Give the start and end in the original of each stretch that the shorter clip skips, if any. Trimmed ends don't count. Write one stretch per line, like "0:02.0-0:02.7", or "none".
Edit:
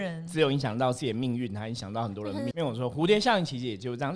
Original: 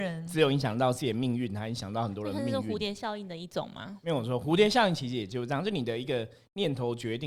0:02.5-0:04.0

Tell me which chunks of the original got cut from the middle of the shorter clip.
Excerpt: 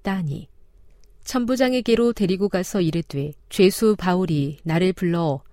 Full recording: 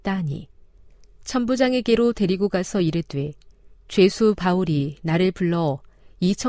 0:03.4-0:03.8

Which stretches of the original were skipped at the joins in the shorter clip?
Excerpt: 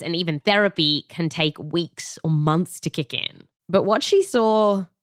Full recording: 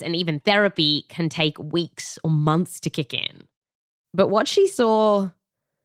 0:03.6-0:04.0

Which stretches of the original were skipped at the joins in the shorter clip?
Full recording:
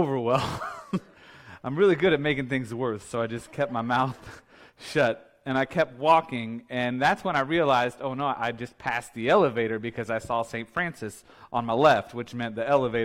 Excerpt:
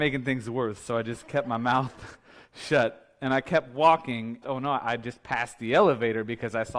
0:06.7-0:08.0

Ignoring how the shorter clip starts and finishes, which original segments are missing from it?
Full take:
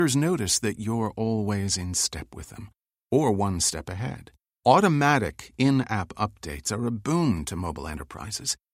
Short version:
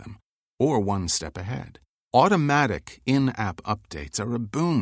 none

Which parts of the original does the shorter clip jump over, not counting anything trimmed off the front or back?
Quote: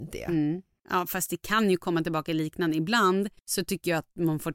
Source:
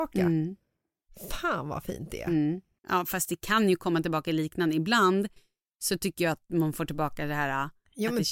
0:05.4-0:05.7

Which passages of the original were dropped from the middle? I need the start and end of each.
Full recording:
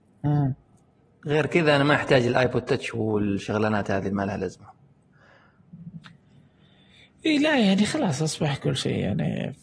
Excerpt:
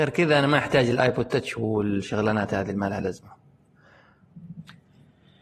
none

